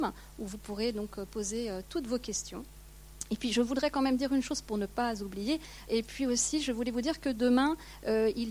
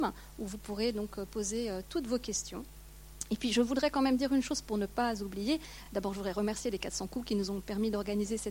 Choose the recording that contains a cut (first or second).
first